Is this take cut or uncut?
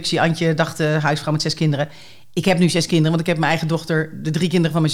uncut